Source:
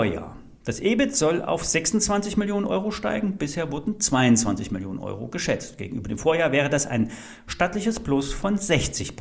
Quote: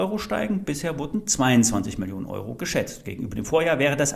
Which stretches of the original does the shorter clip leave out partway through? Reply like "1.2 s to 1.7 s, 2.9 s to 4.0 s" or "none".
none